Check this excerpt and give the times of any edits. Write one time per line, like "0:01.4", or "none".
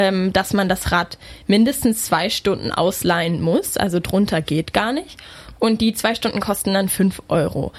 none

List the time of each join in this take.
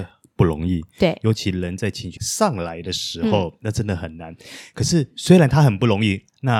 0:02.2

